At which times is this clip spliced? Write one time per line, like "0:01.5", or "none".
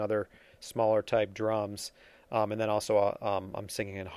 none